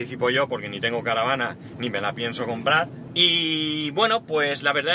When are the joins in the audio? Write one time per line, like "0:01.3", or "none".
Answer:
0:03.1